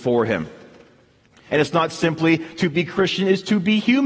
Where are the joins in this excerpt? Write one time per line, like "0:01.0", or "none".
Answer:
0:01.5

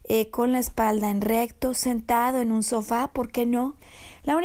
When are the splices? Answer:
none

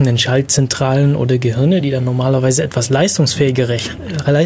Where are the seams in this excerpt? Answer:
none

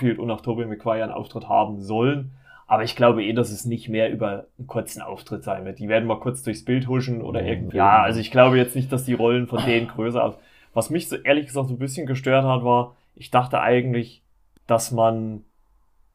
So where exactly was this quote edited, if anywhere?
0:07.7

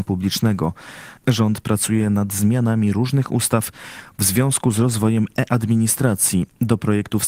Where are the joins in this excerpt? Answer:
0:01.2

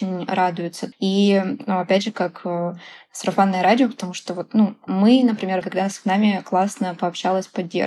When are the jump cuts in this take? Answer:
0:00.9
0:05.6

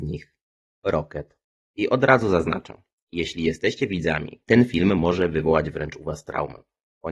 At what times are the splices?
0:04.4

